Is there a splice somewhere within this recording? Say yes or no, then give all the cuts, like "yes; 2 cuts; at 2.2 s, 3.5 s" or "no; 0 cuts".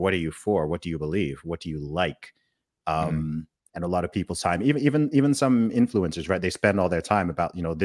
no; 0 cuts